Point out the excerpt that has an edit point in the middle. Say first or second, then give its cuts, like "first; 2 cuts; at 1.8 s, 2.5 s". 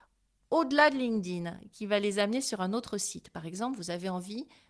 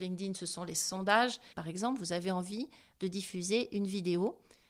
second; 1 cut; at 1.5 s